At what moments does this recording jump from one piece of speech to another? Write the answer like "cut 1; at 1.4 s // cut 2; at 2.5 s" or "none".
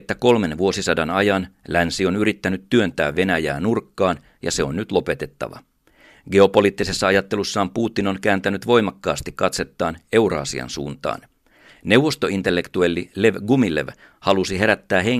cut 1; at 11.7 s